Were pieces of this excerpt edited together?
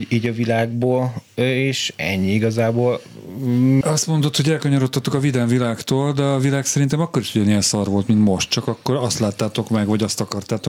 yes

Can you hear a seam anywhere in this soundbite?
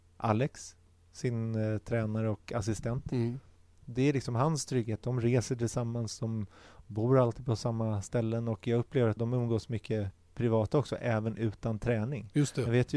yes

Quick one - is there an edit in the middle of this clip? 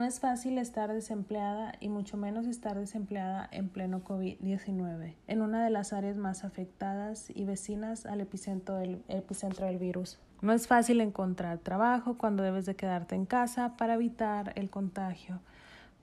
yes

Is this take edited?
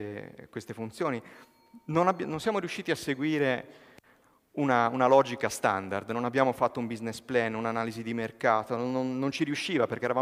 no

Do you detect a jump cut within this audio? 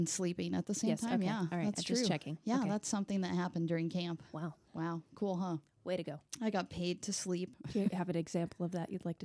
yes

